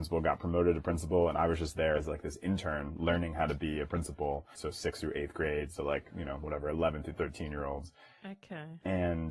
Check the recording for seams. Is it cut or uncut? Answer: cut